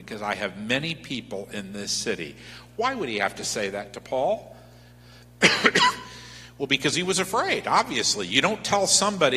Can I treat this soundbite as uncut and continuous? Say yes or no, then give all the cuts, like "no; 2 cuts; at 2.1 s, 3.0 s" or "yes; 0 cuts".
yes; 0 cuts